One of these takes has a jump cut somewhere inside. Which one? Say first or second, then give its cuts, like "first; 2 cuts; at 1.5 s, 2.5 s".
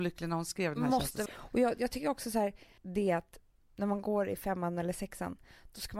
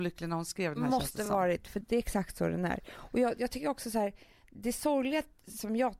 first; 2 cuts; at 1.3 s, 2.8 s